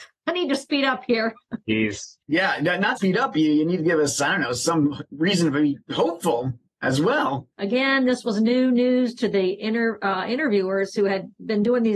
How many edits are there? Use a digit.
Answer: 2